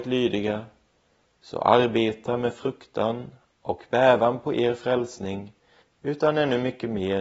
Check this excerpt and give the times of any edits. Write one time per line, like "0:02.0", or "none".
0:05.8